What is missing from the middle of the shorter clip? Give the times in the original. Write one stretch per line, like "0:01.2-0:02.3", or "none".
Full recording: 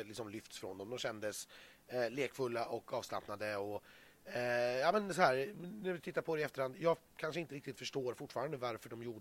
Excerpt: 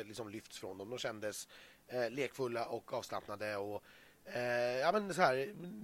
none

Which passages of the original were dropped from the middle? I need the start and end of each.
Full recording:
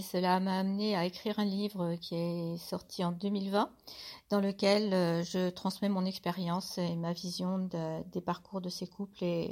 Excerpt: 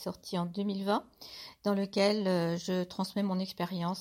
none

